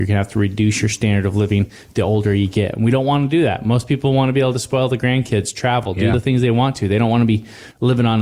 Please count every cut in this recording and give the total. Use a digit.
0